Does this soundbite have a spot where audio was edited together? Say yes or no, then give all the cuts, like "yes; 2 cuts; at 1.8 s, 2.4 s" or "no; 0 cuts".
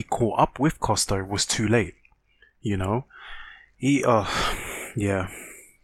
no; 0 cuts